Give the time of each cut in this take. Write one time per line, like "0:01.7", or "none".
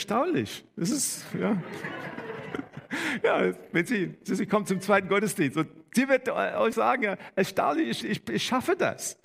0:06.7
0:08.0